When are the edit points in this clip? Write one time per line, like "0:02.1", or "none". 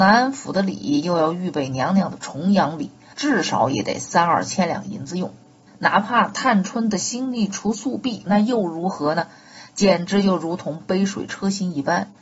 0:03.1
0:05.7
0:08.3